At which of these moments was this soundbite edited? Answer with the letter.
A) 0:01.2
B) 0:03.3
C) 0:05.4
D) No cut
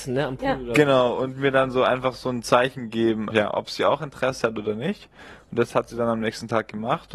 B